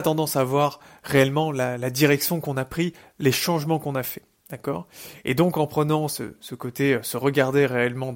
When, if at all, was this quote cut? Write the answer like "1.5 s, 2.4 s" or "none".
none